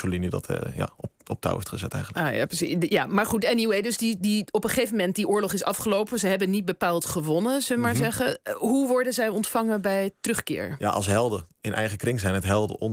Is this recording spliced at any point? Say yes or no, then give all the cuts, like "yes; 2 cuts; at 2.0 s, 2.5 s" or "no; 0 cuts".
no; 0 cuts